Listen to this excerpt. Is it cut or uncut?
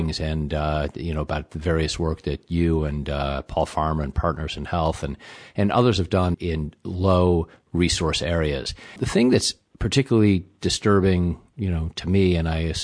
cut